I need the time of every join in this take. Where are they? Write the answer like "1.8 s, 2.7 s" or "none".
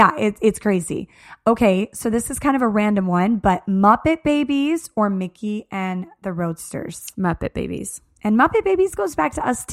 none

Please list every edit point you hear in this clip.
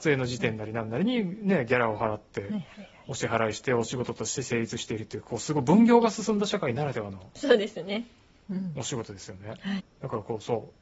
9.8 s

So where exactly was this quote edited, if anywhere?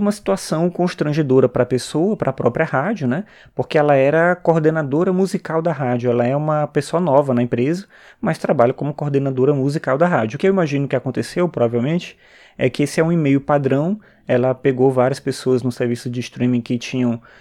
none

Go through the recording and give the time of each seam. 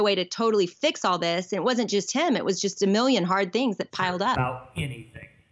4.3 s

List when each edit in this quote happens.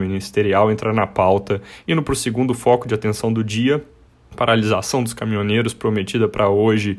1.8 s

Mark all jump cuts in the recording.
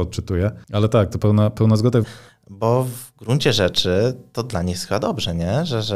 2.0 s

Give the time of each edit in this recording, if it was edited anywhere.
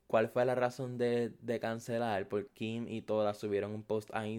2.5 s

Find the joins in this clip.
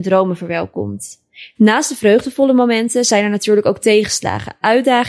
1.6 s

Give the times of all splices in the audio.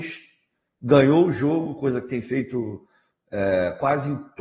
none

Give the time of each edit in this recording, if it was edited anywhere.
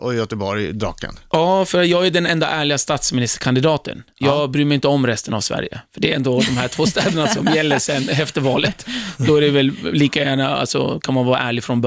4.1 s

